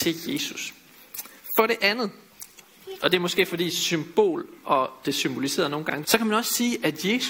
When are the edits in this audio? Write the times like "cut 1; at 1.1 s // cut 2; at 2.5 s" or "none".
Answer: cut 1; at 3.0 s // cut 2; at 6.0 s